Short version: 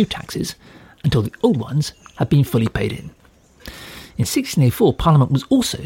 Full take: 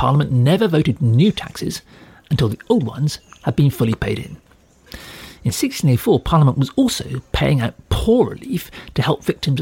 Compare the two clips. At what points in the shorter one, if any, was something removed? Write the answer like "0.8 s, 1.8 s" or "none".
none

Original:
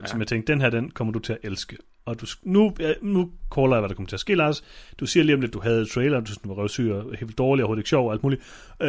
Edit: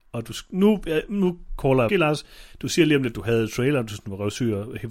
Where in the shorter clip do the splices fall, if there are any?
1.9 s

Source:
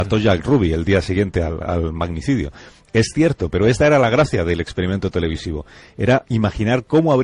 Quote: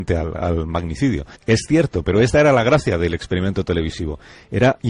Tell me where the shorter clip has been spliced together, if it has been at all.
1.3 s

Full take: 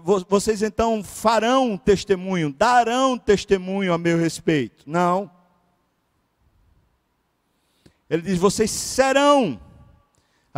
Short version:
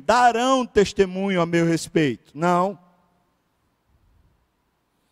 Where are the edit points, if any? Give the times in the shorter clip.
none

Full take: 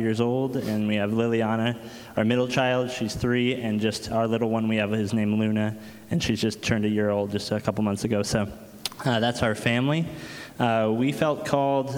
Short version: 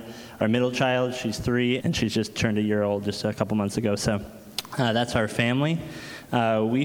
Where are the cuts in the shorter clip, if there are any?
1.8 s

